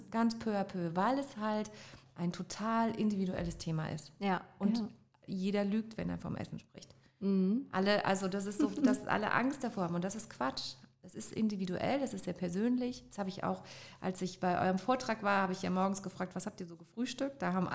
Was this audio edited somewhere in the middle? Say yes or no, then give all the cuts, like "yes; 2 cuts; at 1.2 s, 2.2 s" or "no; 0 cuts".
no; 0 cuts